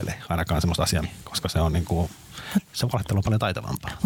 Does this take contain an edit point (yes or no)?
yes